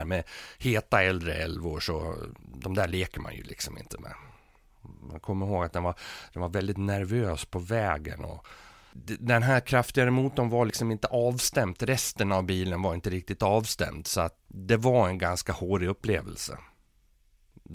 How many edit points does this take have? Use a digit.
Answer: 1